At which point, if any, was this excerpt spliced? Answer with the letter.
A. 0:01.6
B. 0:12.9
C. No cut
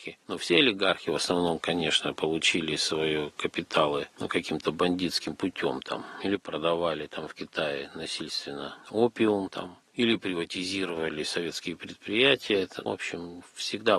B